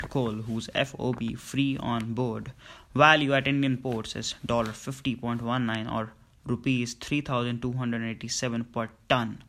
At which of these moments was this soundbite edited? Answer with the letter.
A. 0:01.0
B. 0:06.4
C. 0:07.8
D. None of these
D